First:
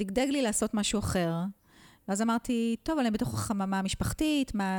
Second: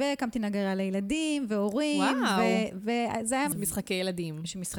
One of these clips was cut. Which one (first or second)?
second